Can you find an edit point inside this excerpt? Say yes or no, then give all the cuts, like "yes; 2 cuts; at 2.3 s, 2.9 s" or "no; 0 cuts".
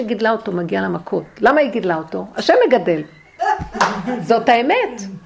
no; 0 cuts